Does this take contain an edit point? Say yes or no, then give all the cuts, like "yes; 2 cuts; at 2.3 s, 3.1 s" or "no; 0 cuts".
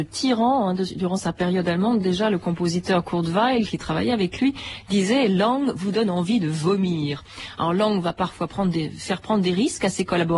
no; 0 cuts